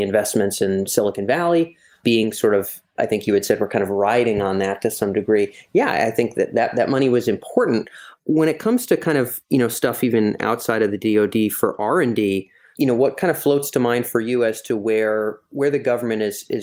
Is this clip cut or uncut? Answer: uncut